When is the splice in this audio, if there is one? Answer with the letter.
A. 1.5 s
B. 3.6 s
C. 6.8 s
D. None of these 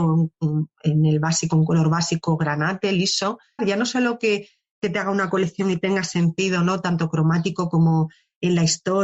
B